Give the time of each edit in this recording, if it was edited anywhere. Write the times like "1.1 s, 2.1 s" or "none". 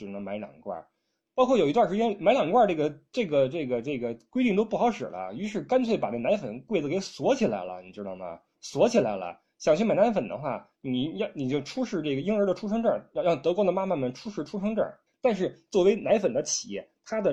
15.1 s